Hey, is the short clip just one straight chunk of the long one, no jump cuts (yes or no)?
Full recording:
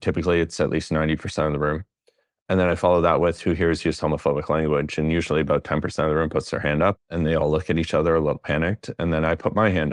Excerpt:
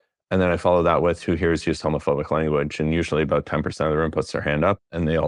yes